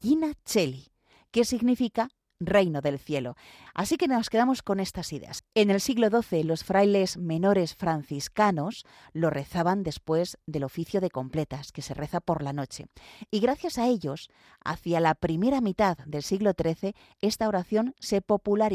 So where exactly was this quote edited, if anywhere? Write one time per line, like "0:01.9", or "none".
0:03.7
0:05.4